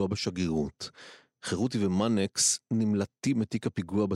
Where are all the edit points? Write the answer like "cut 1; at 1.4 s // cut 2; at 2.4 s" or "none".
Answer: none